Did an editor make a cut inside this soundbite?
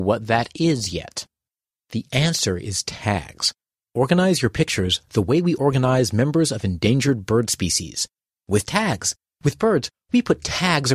no; 0 cuts

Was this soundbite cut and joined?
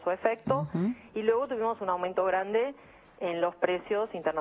no; 0 cuts

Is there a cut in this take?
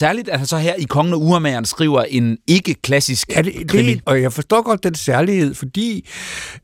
yes; 1 cut; at 4.0 s

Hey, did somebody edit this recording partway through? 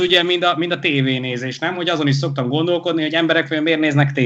no; 0 cuts

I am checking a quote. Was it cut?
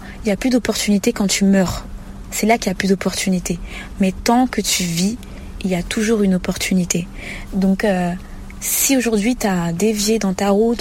yes; 1 cut; at 7.5 s

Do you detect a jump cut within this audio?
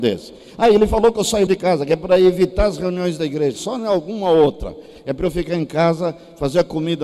yes; 2 cuts; at 1.5 s, 3.6 s

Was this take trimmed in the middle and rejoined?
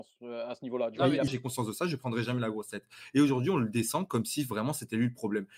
yes; 1 cut; at 1.3 s

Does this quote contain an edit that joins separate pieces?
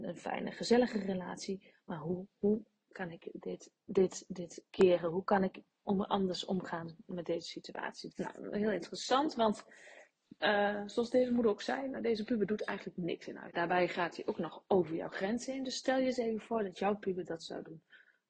yes; 3 cuts; at 8.1 s, 10.4 s, 13.5 s

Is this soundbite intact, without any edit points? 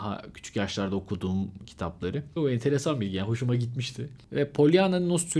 no; 1 cut; at 2.4 s

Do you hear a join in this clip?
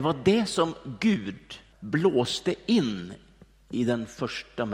yes; 1 cut; at 1.7 s

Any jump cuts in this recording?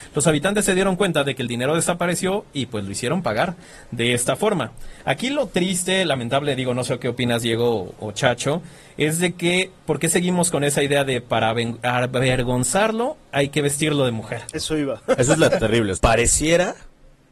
yes; 2 cuts; at 14.5 s, 15.9 s

